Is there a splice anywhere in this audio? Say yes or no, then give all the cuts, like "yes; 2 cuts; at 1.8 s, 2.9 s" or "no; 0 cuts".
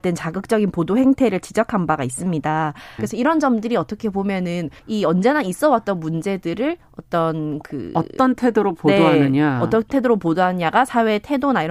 yes; 2 cuts; at 3.0 s, 4.8 s